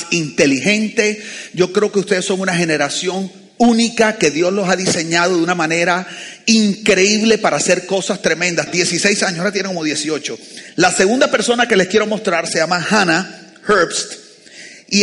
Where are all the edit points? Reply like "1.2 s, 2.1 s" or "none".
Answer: 8.7 s